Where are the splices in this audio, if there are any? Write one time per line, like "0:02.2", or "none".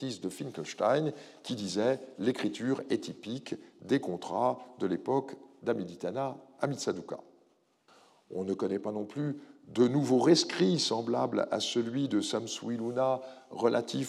none